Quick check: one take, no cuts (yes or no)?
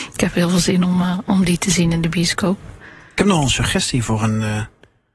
yes